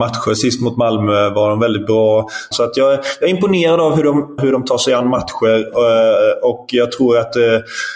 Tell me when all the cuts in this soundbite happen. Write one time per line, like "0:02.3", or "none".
0:02.5
0:04.4